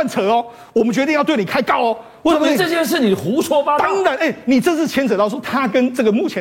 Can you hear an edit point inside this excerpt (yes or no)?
no